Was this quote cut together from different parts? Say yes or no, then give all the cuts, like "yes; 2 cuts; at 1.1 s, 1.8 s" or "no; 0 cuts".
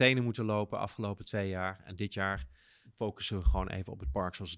no; 0 cuts